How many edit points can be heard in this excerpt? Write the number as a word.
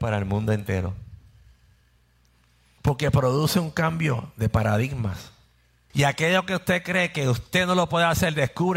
two